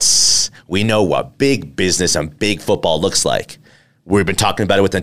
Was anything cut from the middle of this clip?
no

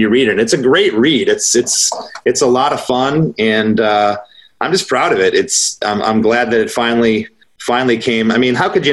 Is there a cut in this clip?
no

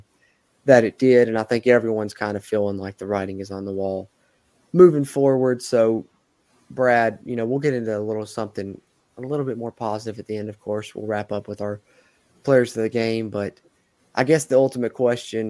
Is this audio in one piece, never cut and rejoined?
yes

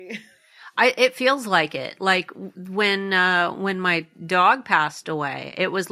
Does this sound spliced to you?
no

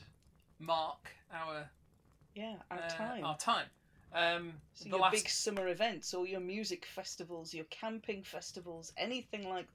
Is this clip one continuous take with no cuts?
yes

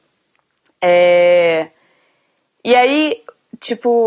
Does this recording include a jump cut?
no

